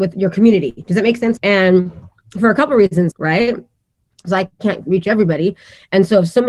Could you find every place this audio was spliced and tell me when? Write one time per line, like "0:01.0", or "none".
0:01.4
0:03.1